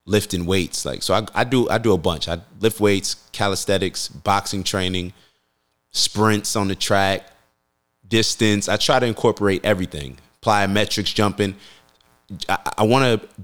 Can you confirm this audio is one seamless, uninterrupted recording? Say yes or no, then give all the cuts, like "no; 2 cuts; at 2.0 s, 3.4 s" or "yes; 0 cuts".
yes; 0 cuts